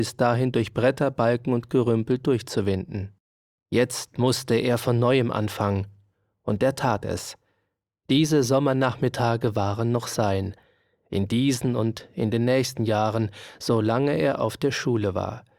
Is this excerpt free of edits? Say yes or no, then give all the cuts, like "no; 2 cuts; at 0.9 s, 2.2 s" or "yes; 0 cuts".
no; 2 cuts; at 3.6 s, 8.0 s